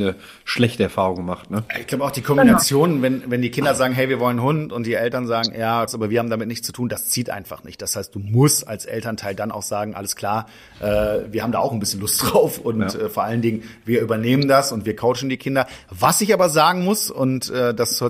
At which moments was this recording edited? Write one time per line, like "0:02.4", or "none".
0:05.9

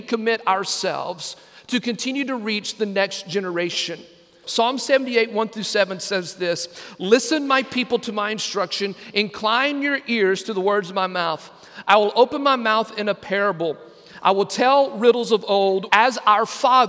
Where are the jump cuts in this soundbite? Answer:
0:04.4
0:15.9

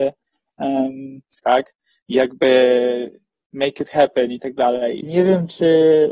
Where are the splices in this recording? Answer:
0:01.4
0:05.0

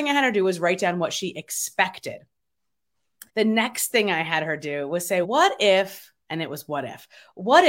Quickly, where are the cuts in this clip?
0:03.3
0:05.2

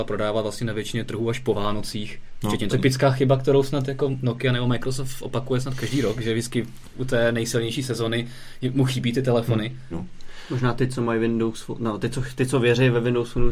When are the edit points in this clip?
0:02.7
0:09.9

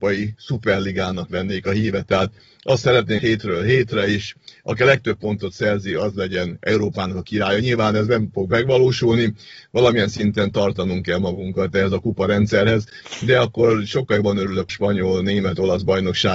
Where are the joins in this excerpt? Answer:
0:03.2
0:14.7

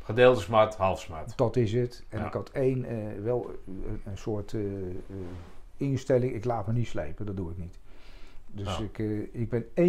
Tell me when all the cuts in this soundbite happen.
none

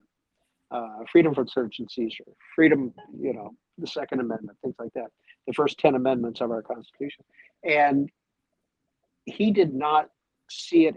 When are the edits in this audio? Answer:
0:03.7

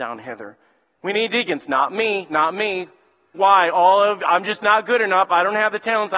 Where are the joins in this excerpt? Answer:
0:00.9
0:03.3

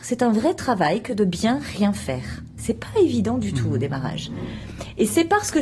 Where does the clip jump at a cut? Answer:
none

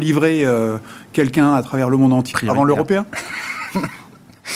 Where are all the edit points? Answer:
0:02.3

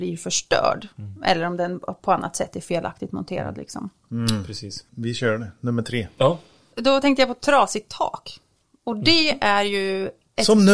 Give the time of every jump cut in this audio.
none

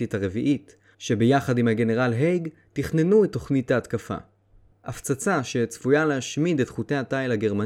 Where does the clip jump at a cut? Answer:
0:00.9
0:04.7

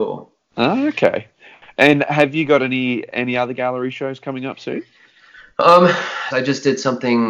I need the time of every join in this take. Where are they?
0:06.3

